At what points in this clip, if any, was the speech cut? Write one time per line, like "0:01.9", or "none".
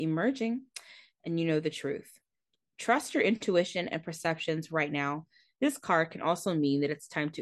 0:05.5